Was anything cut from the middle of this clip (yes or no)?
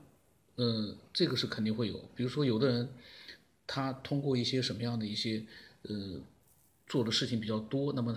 no